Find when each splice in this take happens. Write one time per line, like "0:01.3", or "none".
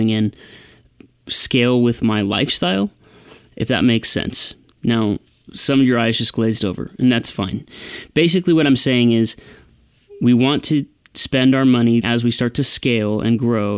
0:01.1
0:04.7
0:12.0